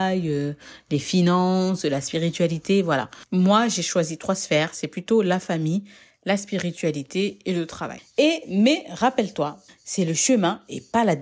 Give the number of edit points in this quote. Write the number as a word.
one